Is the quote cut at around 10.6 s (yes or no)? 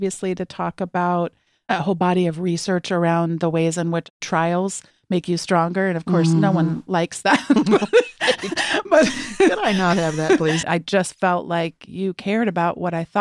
yes